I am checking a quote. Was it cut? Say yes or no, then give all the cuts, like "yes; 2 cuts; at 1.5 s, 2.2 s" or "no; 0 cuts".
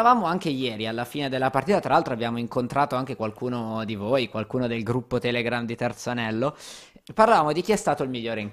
no; 0 cuts